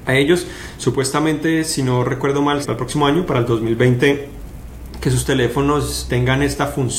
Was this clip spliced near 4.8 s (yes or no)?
no